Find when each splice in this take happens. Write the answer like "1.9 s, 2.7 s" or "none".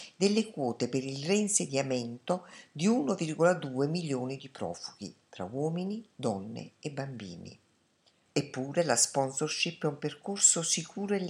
8.3 s